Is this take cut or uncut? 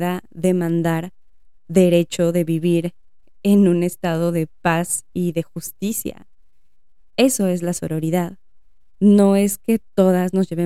uncut